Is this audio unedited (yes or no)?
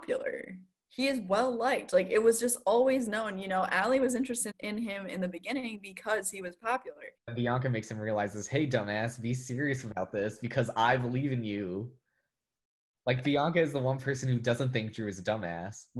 no